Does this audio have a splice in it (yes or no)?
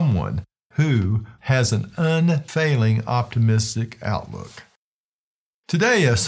yes